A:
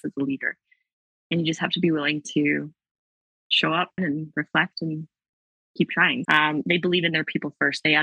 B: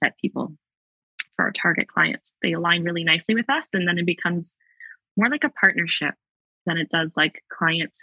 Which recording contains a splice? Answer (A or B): A